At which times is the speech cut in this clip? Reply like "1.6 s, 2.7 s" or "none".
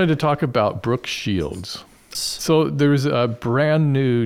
2.1 s